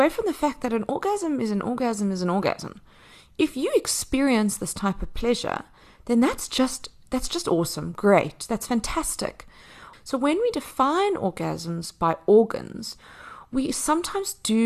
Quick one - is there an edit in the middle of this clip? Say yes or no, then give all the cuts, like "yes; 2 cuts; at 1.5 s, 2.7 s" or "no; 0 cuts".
yes; 1 cut; at 9.9 s